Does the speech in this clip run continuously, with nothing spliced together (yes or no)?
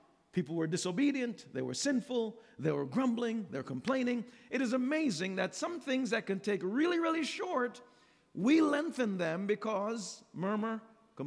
yes